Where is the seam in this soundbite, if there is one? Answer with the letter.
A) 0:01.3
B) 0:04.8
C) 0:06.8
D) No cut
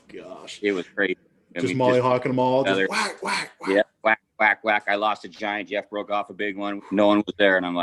C